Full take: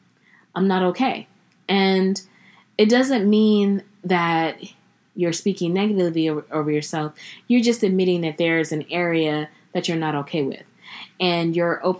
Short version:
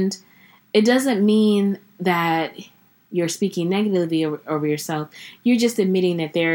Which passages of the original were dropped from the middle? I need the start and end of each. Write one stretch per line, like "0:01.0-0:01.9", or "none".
none